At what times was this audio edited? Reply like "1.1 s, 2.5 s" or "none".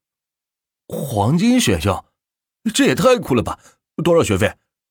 none